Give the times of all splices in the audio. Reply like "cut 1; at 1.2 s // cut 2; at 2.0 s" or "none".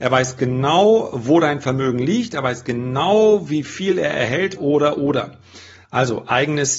cut 1; at 4.6 s // cut 2; at 5.8 s